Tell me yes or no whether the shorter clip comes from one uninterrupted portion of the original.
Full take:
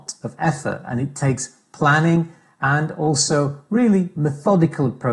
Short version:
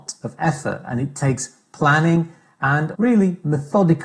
no